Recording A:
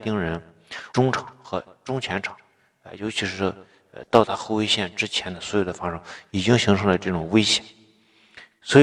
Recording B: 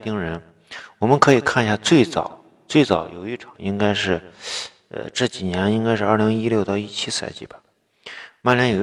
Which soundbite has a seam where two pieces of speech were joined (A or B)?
A